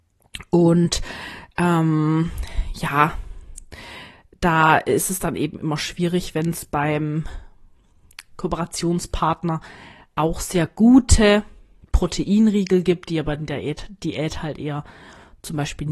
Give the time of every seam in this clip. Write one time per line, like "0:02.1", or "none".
0:08.3

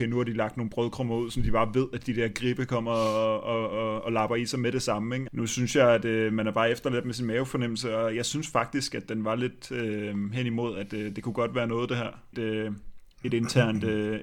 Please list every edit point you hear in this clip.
0:05.3
0:12.3

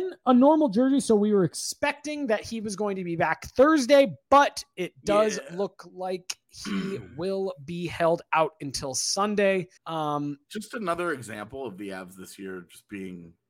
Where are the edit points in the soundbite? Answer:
0:09.8

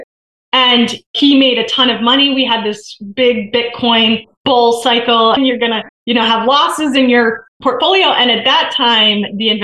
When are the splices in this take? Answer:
0:05.4

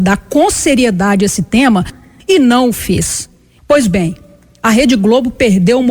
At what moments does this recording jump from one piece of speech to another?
0:03.6

